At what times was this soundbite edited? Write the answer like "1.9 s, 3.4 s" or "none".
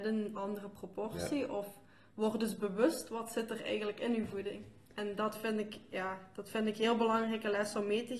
none